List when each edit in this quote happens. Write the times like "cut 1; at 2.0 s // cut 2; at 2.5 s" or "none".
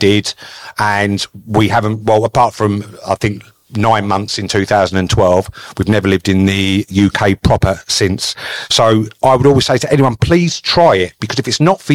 none